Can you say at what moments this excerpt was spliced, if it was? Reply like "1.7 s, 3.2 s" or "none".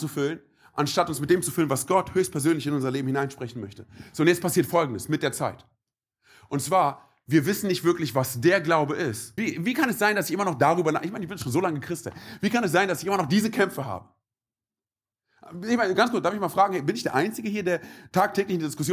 9.4 s